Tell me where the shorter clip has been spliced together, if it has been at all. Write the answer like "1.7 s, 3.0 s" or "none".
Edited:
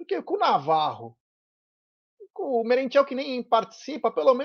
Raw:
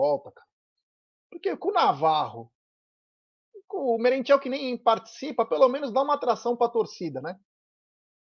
none